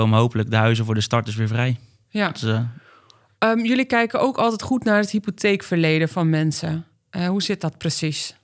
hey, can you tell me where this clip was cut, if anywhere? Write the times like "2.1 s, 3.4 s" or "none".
none